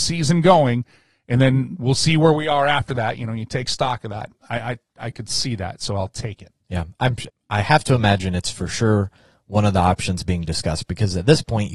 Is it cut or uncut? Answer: cut